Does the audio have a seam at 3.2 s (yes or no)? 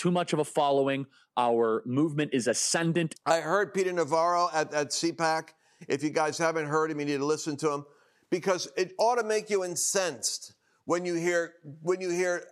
yes